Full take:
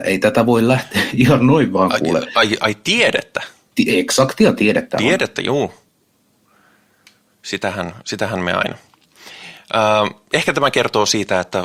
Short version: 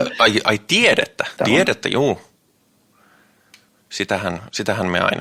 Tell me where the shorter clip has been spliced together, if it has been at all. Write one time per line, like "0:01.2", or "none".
0:01.4